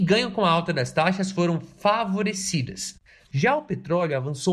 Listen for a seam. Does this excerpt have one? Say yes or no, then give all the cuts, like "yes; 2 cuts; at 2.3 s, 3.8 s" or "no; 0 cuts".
yes; 1 cut; at 3.3 s